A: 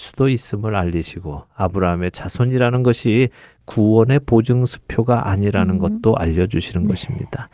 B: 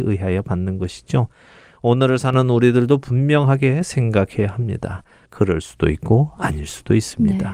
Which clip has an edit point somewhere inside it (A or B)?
B